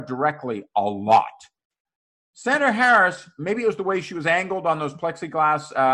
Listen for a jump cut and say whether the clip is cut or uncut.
uncut